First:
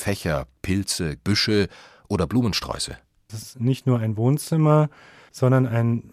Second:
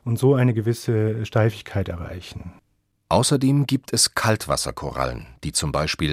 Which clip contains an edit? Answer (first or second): first